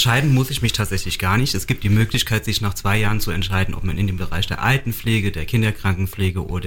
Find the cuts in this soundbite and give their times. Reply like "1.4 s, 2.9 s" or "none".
none